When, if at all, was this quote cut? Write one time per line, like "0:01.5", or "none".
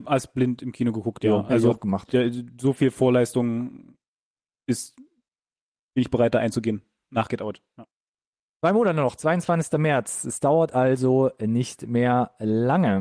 none